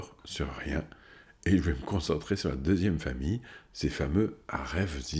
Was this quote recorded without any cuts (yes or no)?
yes